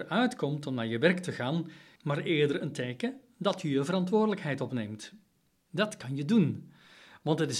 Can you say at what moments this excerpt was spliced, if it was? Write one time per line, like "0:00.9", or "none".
0:02.0
0:05.6